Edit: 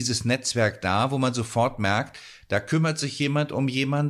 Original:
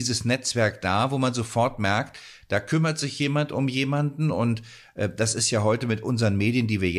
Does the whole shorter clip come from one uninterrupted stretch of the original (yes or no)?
yes